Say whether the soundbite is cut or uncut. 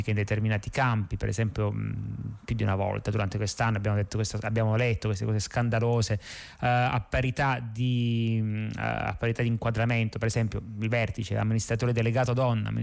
uncut